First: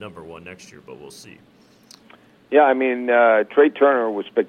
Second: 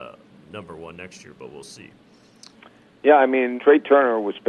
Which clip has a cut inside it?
second; 1 cut; at 3.6 s

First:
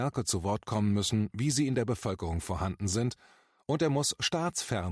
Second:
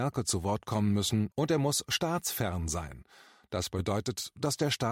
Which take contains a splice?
second; 1 cut; at 1.3 s

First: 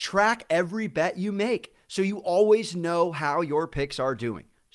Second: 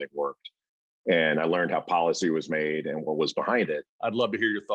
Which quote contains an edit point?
second; 1 cut; at 3.8 s

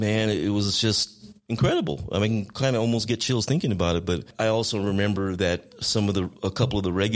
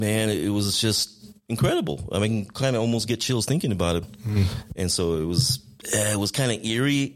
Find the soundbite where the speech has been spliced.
second; 1 cut; at 4.0 s

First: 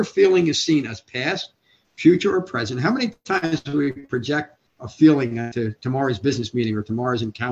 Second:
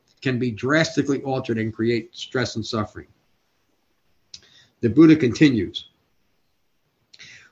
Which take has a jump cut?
first; 1 cut; at 4.7 s

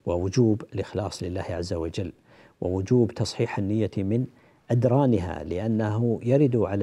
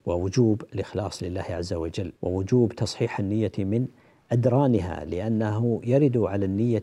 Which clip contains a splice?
second; 1 cut; at 2.2 s

